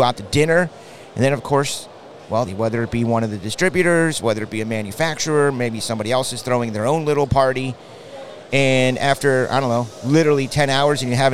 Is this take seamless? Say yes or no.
no